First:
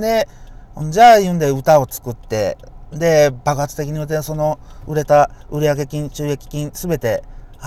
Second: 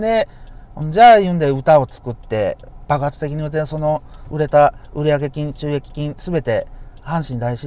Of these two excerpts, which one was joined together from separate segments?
second; 1 cut; at 2.9 s

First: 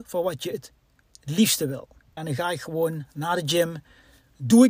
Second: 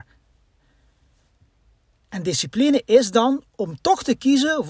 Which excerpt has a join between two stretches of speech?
first; 1 cut; at 2.2 s

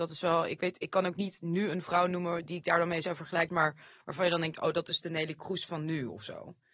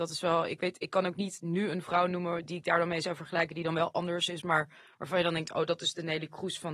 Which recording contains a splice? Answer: first; 1 cut; at 3.5 s

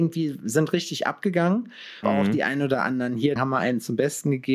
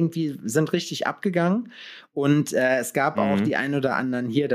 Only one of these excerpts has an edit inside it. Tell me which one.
first; 2 cuts; at 2.0 s, 3.4 s

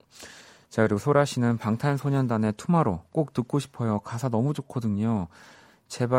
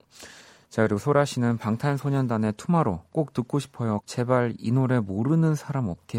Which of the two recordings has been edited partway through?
second; 1 cut; at 4.0 s

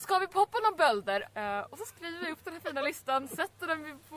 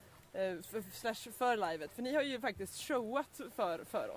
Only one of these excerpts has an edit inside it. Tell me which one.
first; 1 cut; at 1.2 s

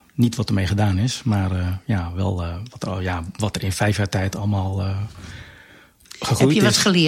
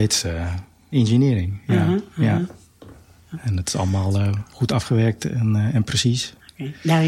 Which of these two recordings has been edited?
second; 1 cut; at 0.9 s

